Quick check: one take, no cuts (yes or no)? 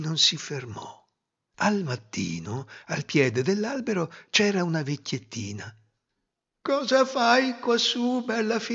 no